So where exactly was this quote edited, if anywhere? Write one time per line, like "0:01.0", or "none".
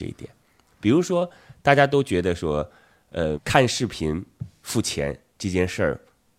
0:03.3